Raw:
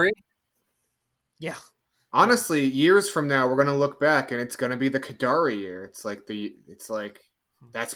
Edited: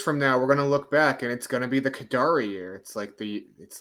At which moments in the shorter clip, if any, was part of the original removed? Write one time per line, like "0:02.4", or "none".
none